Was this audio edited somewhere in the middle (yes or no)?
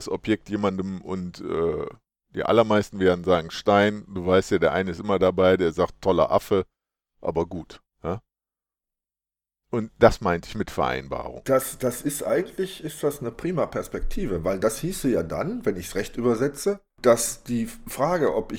yes